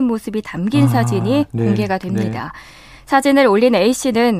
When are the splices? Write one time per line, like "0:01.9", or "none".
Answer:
none